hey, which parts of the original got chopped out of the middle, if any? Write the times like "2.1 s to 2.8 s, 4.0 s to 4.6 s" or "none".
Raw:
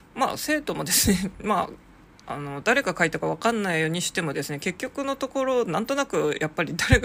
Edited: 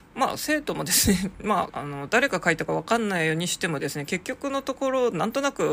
1.7 s to 2.2 s